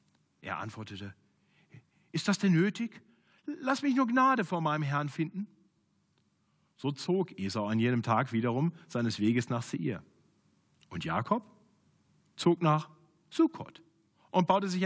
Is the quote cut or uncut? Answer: uncut